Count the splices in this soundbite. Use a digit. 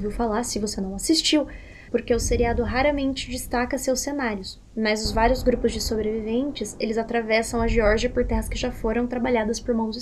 1